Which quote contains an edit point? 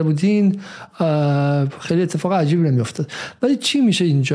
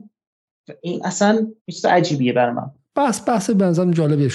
second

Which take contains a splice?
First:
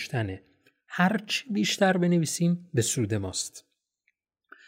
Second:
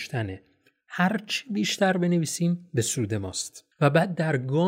second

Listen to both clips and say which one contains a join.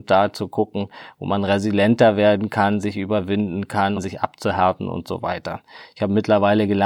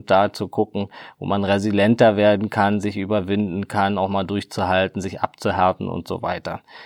first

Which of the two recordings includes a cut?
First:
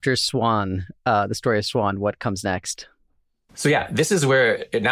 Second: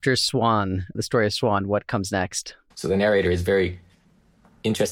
second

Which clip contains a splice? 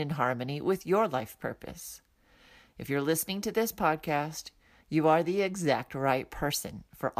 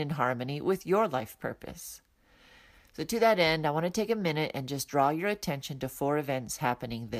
first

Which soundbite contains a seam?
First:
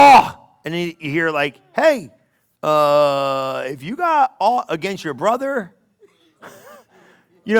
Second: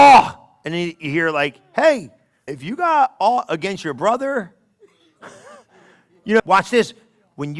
second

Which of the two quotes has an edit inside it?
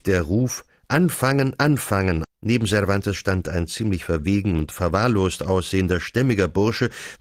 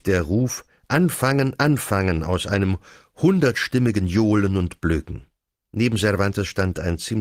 first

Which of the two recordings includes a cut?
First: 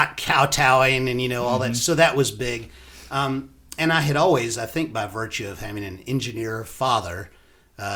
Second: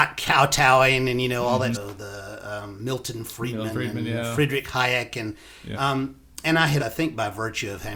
second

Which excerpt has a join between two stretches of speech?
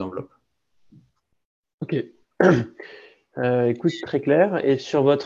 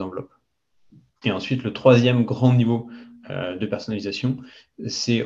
second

